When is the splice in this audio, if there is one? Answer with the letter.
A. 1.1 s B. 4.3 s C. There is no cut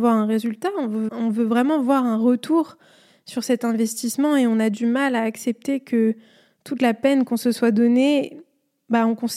A